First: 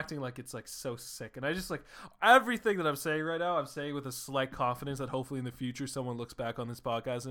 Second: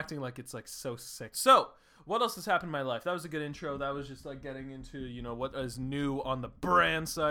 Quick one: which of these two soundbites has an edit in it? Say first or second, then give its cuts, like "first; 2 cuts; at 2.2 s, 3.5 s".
second; 1 cut; at 1.3 s